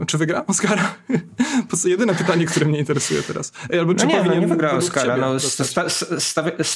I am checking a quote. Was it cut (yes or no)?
no